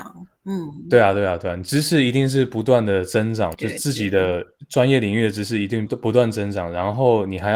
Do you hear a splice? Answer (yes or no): yes